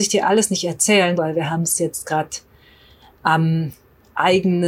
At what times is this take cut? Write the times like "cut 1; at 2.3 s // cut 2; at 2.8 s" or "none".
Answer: cut 1; at 1.2 s